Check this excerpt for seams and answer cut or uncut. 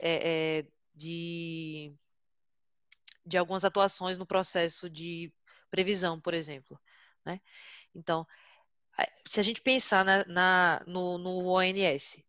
uncut